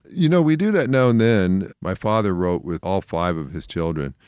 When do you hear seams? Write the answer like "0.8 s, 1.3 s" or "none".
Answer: 1.7 s, 2.8 s